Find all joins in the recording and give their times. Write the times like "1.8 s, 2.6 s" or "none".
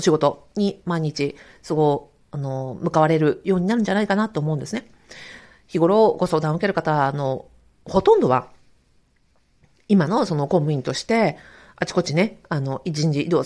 none